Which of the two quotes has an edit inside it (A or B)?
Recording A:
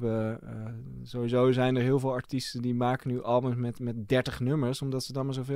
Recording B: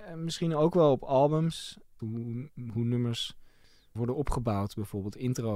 B